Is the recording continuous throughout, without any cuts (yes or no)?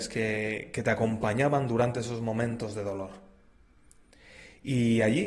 yes